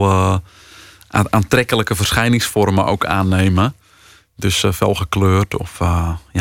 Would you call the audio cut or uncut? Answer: uncut